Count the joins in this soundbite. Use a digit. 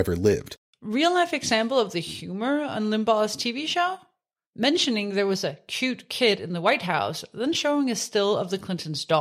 0